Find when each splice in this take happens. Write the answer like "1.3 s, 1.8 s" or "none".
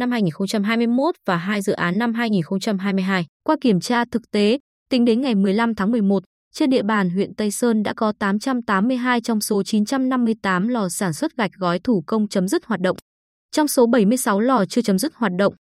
3.4 s